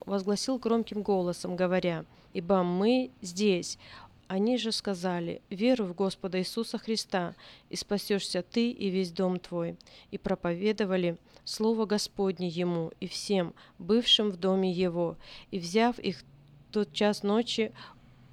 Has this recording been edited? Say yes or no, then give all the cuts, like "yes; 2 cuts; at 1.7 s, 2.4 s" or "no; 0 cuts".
yes; 2 cuts; at 2.3 s, 4.2 s